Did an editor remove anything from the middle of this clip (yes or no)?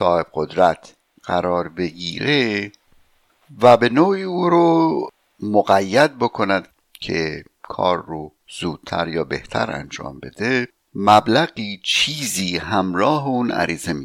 yes